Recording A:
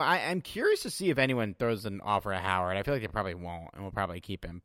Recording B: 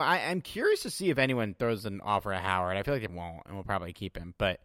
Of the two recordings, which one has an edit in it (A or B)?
B